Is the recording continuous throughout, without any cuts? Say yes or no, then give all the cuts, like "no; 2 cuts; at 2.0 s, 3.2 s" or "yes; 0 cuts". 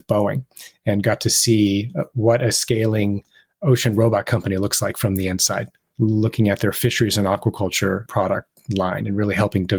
yes; 0 cuts